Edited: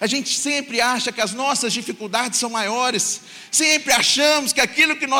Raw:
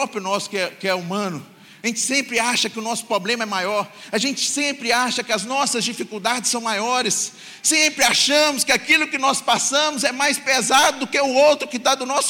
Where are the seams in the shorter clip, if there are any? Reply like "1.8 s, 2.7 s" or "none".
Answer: none

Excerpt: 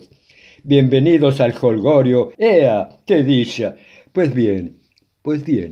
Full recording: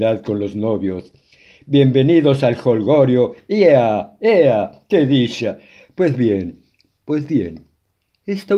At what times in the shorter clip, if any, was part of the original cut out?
2.3 s

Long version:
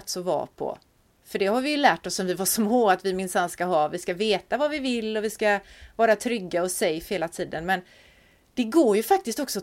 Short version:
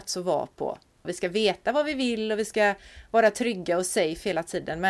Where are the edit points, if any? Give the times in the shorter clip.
1.0 s

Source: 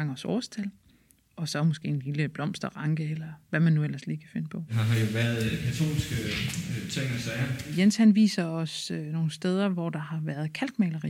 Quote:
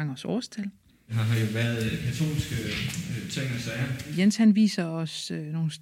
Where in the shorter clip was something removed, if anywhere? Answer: 1.1 s

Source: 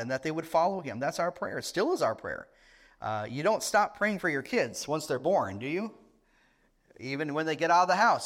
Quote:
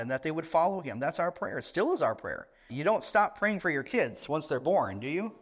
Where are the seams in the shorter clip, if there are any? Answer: 2.7 s

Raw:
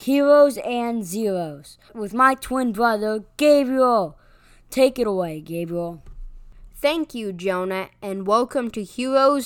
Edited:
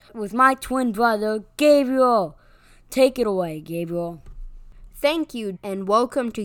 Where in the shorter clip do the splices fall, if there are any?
5.5 s

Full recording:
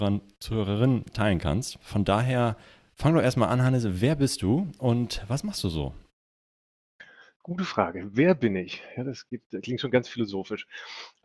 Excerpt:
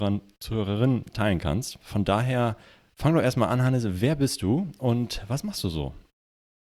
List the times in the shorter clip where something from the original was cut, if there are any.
none

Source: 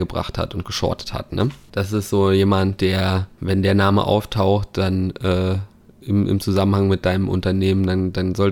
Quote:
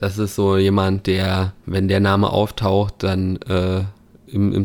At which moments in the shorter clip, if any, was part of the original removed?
none

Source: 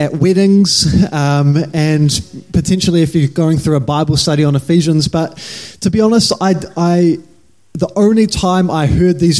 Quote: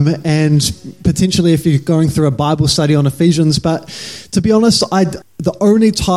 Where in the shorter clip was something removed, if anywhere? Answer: 5.2 s

